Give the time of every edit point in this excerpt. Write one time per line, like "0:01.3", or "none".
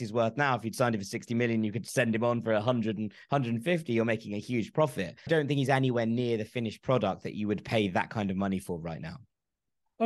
0:05.3